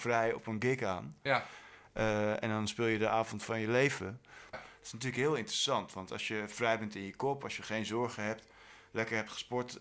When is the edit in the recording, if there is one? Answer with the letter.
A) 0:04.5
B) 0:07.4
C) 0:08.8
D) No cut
A